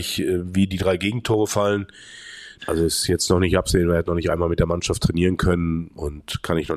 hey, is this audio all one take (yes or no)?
no